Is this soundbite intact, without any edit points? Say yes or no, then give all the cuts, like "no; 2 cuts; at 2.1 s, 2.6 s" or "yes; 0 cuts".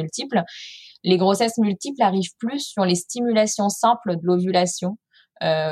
yes; 0 cuts